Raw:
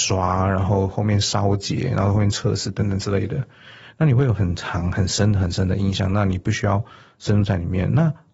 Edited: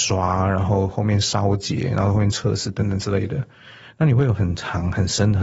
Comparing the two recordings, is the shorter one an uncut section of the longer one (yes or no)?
yes